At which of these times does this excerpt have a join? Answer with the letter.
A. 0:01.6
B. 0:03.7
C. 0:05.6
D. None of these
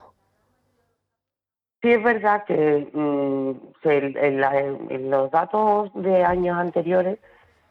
D